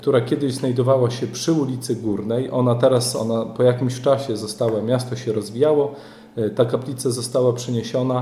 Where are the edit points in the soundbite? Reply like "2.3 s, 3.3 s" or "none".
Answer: none